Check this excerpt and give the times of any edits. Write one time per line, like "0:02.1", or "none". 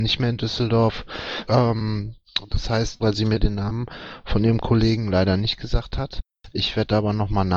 0:01.5
0:03.0